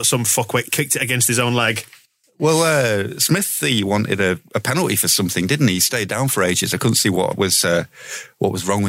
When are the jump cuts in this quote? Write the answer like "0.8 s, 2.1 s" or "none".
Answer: none